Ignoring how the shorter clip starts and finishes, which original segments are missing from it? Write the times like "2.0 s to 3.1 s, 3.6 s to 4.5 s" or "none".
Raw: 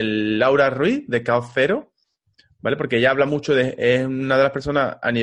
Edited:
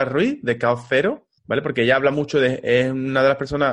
2.0 s to 2.5 s